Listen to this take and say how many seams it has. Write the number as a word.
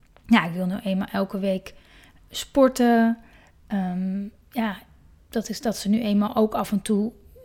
one